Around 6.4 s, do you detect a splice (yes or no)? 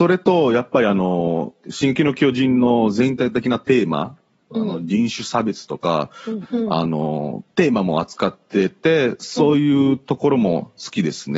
yes